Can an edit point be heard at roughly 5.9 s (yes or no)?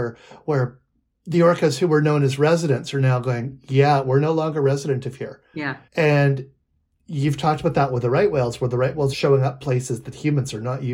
yes